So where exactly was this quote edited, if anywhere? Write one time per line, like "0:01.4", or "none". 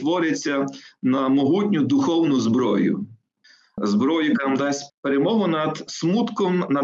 0:04.9